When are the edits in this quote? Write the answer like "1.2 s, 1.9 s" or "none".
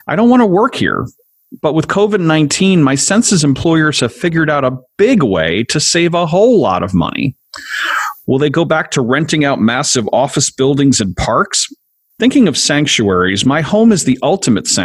12.1 s